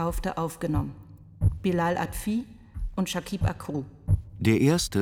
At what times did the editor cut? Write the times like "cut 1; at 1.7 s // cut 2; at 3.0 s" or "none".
none